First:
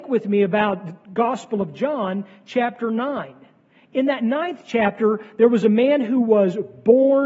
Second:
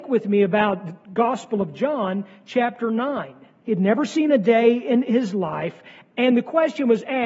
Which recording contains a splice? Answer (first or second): second